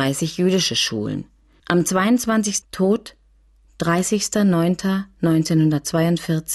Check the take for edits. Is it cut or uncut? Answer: cut